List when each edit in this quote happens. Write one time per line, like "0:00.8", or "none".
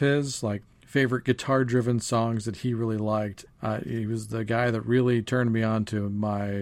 0:03.5